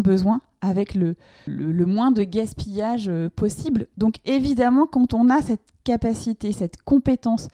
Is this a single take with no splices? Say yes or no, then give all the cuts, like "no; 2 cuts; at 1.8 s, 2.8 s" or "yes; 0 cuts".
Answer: no; 1 cut; at 1.5 s